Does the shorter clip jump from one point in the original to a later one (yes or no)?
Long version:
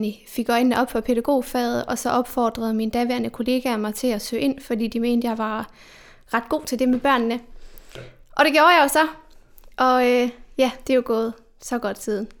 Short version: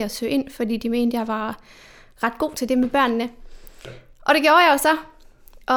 no